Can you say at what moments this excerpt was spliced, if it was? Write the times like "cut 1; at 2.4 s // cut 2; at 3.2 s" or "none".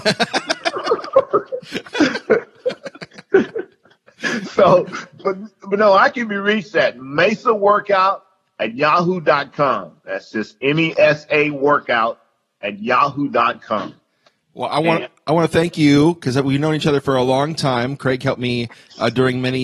none